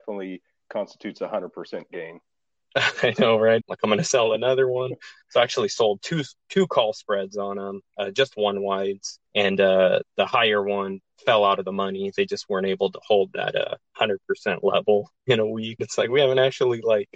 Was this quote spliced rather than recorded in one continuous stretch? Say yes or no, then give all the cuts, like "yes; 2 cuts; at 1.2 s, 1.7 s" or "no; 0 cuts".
yes; 3 cuts; at 3.6 s, 9.3 s, 15.8 s